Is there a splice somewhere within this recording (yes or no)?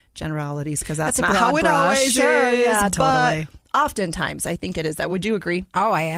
no